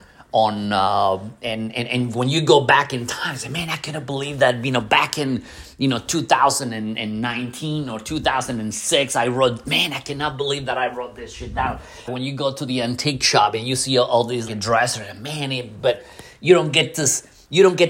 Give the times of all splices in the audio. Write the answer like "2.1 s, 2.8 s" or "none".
12.1 s, 14.5 s